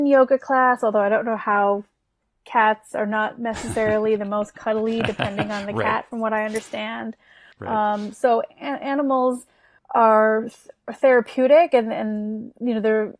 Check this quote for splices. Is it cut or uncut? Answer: uncut